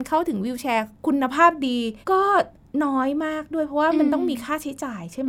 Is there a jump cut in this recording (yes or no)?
yes